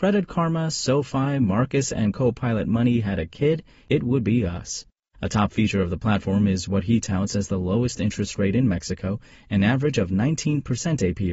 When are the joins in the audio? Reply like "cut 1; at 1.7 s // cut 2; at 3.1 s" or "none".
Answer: none